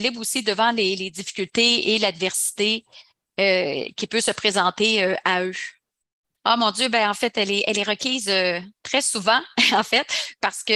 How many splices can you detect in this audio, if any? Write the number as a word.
one